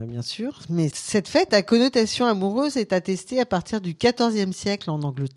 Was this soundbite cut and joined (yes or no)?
yes